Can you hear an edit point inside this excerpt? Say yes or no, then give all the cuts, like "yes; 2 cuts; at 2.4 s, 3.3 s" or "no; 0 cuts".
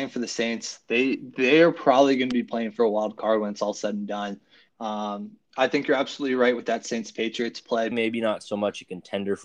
yes; 2 cuts; at 4.7 s, 7.9 s